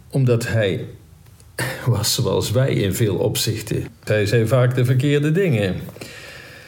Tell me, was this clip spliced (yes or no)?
yes